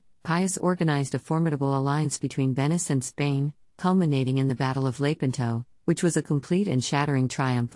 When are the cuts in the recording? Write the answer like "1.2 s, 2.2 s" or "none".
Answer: none